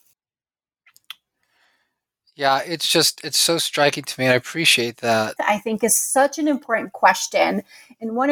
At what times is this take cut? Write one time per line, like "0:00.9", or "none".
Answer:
0:05.4